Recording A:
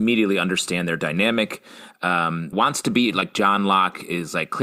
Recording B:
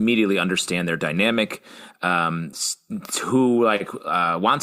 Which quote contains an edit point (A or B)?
A